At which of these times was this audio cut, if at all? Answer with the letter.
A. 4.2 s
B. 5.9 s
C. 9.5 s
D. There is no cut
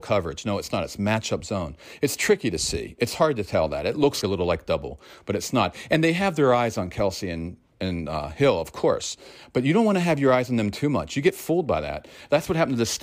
A